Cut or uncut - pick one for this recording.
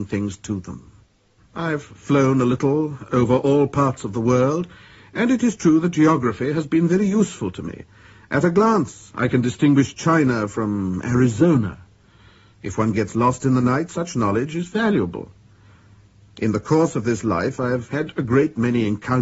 cut